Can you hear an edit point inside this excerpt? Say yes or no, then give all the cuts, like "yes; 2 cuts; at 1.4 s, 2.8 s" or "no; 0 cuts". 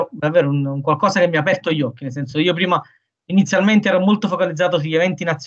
no; 0 cuts